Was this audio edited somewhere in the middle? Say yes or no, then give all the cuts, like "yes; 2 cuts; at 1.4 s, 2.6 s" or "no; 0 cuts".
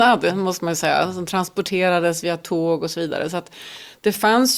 no; 0 cuts